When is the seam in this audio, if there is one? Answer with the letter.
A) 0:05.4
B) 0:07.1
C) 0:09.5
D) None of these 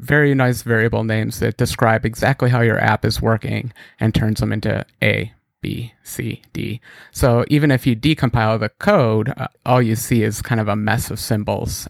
C